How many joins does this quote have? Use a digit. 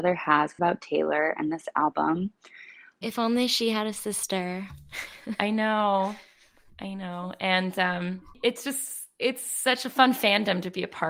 1